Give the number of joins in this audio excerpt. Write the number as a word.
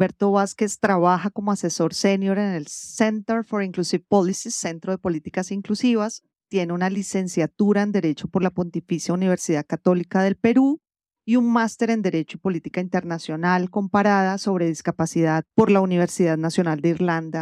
one